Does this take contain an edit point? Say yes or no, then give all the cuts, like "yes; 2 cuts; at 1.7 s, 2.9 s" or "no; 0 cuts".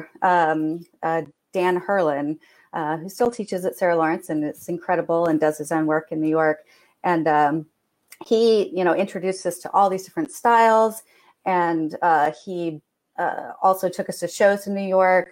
no; 0 cuts